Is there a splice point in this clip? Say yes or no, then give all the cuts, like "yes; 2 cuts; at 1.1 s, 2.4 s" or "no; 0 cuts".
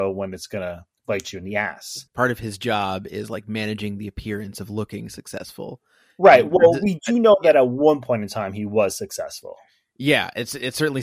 yes; 1 cut; at 2.1 s